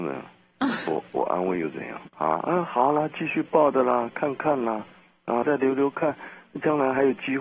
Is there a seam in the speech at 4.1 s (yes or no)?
no